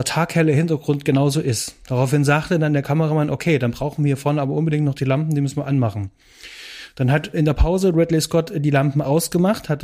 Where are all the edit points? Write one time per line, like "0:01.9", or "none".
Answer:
0:07.3